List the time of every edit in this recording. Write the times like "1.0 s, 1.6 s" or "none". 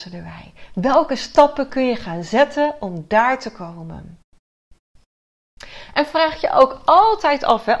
none

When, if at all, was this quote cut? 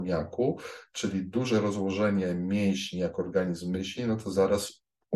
none

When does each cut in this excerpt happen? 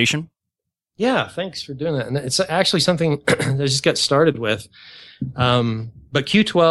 none

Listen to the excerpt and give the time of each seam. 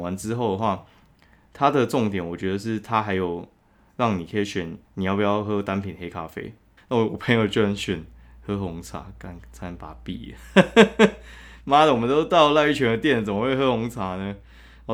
4.8 s, 6.8 s

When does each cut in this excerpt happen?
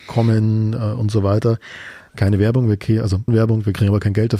2.1 s, 3.3 s

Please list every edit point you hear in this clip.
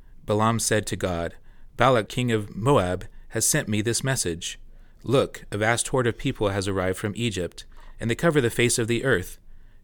2.1 s

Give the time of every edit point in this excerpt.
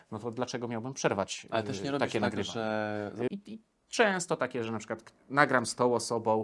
3.3 s

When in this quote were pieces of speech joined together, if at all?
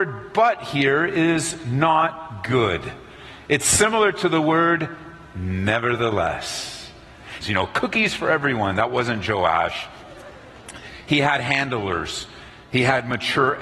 7.4 s

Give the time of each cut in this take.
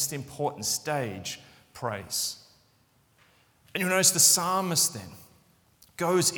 none

